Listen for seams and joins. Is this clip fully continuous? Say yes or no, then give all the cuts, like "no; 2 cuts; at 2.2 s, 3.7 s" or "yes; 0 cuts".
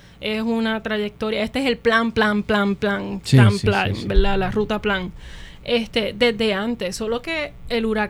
yes; 0 cuts